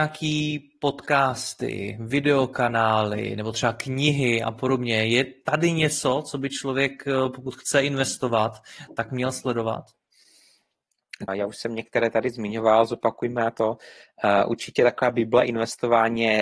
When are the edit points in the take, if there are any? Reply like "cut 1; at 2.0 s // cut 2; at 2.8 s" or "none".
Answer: cut 1; at 11.3 s